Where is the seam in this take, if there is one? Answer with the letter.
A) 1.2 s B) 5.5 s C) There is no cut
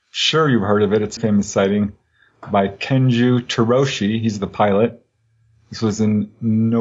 A